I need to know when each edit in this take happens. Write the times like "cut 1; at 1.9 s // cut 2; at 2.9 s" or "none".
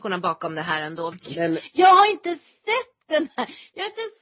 cut 1; at 1.1 s